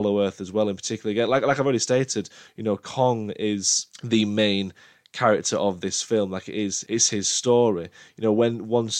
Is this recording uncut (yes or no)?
yes